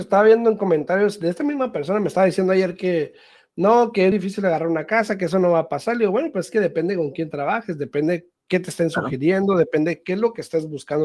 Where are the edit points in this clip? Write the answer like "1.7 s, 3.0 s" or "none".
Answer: 4.1 s